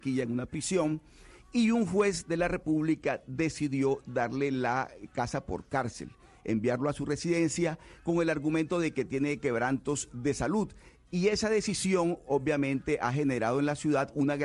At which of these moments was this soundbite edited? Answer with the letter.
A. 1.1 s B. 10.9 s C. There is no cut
C